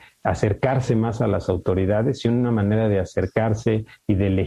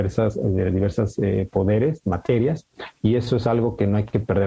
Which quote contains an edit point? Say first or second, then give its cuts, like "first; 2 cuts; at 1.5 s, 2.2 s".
second; 1 cut; at 2.0 s